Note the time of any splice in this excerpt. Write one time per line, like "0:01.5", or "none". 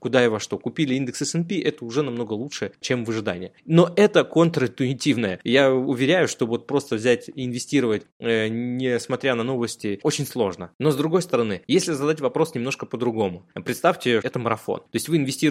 0:14.2